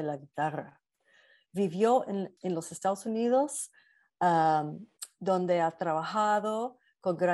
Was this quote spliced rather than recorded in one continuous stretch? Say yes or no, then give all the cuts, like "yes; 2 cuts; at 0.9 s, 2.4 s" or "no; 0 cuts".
yes; 1 cut; at 2.4 s